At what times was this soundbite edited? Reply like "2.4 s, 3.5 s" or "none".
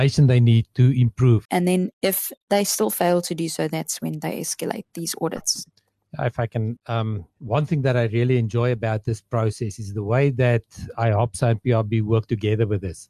1.4 s, 6.8 s